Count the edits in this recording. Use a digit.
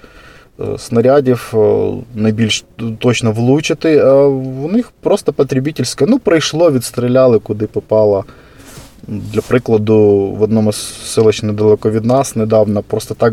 0